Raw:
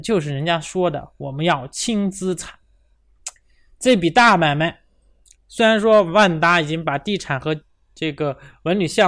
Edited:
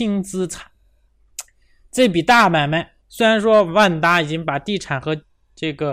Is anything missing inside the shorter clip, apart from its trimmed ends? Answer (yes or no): yes